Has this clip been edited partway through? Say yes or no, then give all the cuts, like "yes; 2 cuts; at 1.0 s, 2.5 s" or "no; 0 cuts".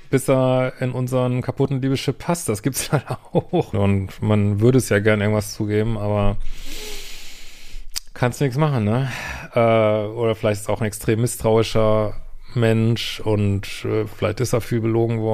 yes; 1 cut; at 3.7 s